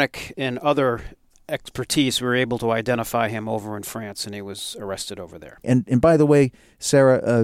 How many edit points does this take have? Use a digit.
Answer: 1